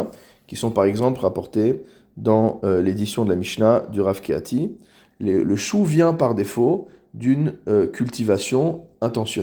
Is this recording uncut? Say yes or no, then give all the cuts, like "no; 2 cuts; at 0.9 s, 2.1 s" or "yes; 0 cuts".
no; 1 cut; at 5.1 s